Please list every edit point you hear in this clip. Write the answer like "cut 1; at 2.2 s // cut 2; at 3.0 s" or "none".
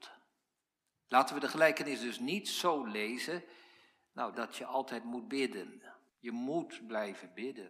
cut 1; at 4.3 s // cut 2; at 6.1 s